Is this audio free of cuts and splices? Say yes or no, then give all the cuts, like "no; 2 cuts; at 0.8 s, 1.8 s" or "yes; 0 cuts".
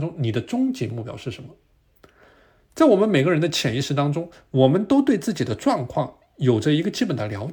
yes; 0 cuts